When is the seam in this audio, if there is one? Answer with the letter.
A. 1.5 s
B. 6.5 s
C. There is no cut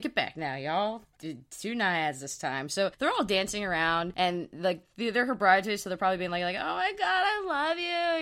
C